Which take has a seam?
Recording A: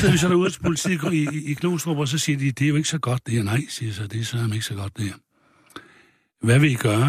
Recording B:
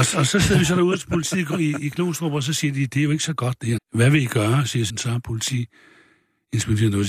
B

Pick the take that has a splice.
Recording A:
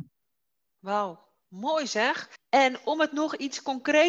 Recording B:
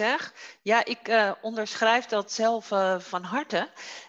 A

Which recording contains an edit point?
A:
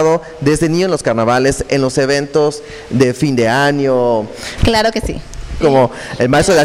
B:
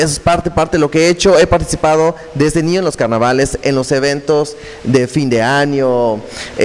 A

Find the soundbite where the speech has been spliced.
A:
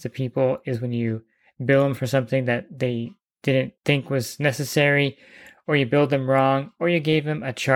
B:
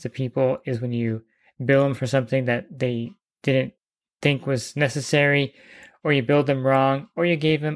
A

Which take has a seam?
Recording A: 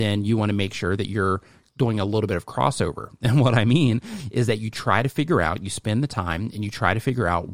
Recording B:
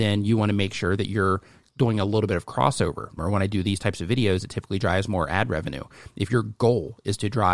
B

